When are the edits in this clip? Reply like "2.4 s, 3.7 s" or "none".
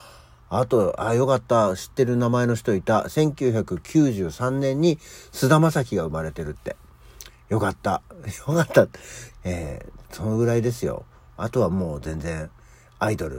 9.3 s